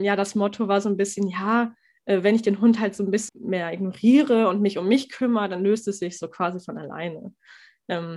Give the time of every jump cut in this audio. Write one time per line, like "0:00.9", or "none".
0:03.3